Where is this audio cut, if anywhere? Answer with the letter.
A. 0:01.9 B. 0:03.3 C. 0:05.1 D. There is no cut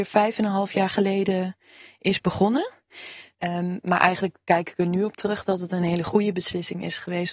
B